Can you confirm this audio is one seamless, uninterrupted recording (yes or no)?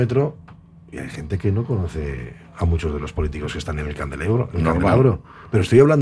yes